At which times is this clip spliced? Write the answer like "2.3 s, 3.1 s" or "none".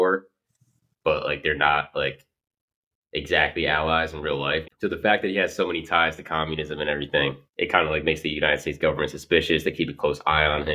4.6 s, 7.5 s